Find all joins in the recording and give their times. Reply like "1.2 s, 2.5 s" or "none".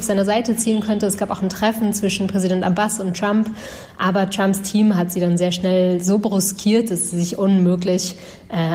none